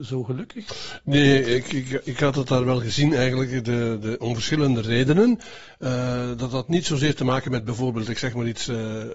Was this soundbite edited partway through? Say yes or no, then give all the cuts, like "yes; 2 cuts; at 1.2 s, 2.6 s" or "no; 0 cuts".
no; 0 cuts